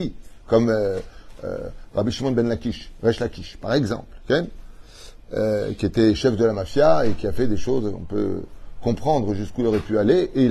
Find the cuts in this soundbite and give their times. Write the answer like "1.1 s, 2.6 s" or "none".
none